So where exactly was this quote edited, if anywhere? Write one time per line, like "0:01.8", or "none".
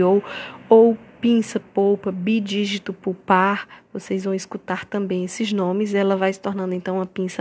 0:01.6